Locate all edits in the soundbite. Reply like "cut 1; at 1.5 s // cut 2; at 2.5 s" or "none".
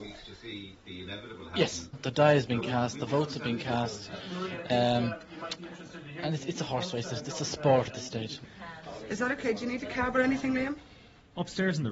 cut 1; at 7.9 s